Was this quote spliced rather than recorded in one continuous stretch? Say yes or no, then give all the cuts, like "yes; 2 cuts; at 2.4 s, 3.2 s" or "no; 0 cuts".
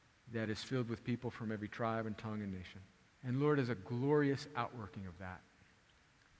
yes; 1 cut; at 3.1 s